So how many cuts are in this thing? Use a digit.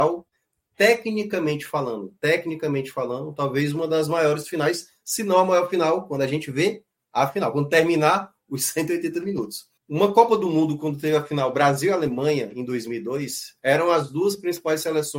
1